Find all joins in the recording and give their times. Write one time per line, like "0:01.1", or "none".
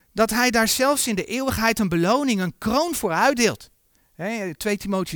none